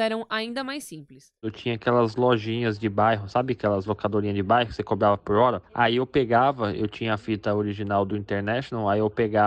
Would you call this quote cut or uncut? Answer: uncut